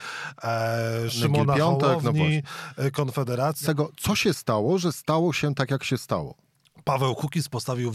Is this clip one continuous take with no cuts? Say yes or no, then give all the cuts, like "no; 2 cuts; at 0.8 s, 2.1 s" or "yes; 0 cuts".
no; 1 cut; at 3.6 s